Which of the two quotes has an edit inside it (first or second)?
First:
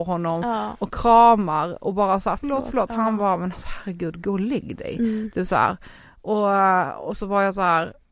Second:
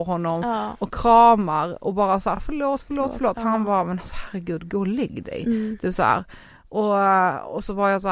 first